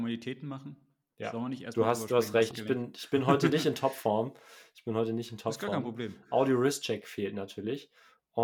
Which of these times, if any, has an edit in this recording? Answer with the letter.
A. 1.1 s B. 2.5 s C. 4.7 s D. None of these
B